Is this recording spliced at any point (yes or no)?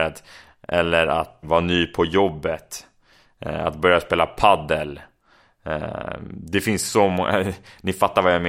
yes